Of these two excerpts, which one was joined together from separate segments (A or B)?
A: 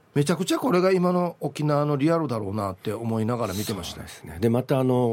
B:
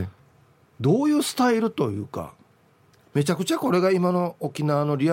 B